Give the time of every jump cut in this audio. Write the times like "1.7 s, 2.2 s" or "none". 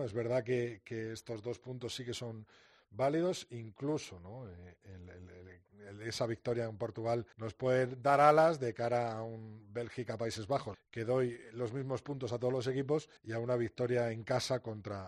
7.3 s, 10.7 s, 13.2 s